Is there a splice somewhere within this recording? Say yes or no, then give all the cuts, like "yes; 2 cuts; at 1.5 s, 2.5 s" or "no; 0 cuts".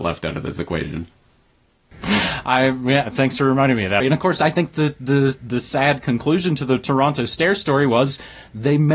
yes; 1 cut; at 4.0 s